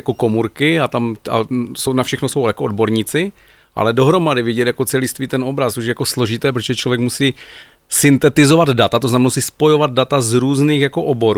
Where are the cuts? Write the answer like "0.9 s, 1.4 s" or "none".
none